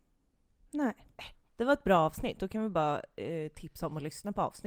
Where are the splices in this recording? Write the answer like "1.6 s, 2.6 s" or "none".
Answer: 1.3 s